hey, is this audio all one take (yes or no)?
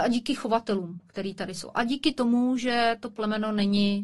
yes